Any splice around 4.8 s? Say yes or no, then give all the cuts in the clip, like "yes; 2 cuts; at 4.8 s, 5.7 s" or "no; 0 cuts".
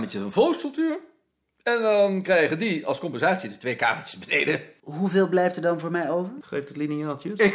yes; 2 cuts; at 4.8 s, 6.4 s